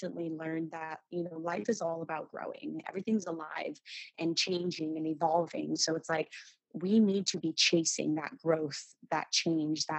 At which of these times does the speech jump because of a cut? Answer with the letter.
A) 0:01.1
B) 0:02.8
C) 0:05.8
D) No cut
B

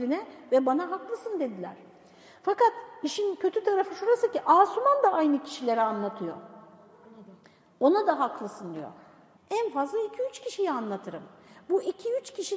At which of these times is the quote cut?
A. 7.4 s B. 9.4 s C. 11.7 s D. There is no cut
B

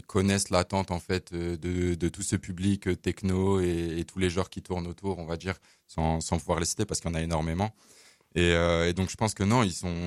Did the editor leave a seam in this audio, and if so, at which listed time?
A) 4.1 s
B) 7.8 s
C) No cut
C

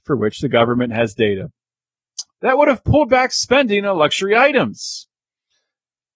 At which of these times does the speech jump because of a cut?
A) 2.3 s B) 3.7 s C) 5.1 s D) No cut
A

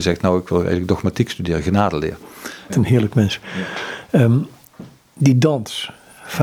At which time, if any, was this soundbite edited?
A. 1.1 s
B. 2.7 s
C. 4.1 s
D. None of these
B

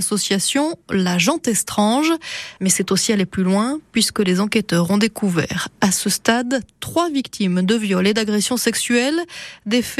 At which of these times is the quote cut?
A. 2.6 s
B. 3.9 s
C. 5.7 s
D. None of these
A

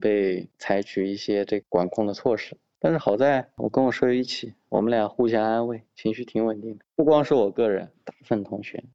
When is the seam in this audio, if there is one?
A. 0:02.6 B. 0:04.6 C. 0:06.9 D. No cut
D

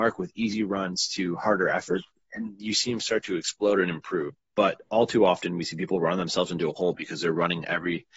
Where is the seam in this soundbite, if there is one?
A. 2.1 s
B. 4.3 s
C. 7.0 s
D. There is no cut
B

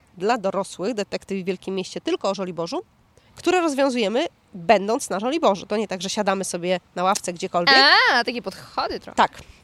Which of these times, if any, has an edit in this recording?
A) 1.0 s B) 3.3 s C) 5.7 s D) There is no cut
B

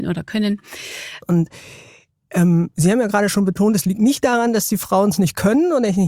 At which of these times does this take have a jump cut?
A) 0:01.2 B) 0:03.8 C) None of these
A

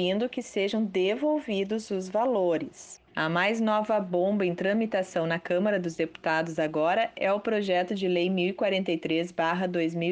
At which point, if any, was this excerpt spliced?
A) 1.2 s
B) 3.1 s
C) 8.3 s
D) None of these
B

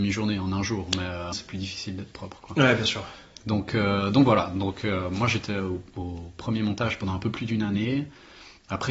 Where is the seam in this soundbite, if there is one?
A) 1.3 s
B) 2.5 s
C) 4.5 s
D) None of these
A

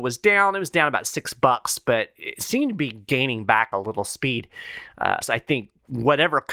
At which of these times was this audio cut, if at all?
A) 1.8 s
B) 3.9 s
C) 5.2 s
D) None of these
C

